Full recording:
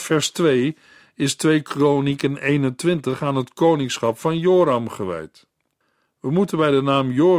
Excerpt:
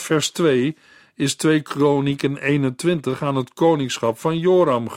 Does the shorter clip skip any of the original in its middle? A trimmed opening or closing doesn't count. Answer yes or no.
no